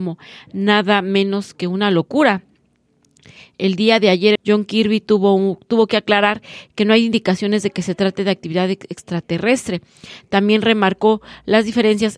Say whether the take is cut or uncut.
cut